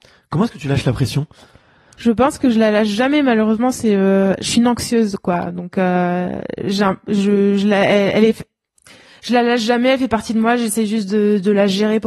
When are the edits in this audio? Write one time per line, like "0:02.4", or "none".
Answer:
none